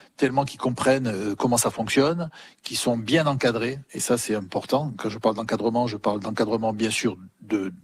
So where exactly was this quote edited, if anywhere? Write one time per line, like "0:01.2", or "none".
none